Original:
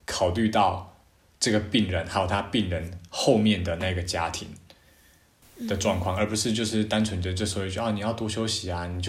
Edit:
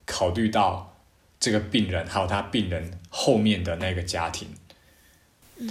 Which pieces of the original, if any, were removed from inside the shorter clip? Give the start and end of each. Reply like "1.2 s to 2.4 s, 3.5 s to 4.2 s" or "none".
none